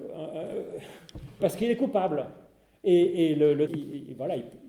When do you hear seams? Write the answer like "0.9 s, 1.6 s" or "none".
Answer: 1.4 s, 3.7 s